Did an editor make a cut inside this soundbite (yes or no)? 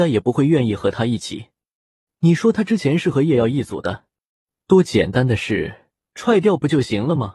yes